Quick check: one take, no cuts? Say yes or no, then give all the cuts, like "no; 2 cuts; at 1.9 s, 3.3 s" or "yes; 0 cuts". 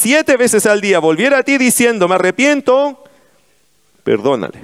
yes; 0 cuts